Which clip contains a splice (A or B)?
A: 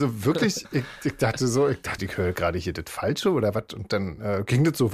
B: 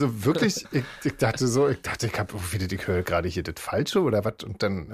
A